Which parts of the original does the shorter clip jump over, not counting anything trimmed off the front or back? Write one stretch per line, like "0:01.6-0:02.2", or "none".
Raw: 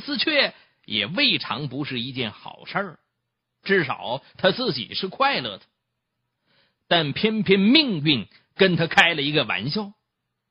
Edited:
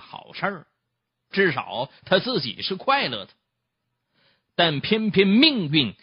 none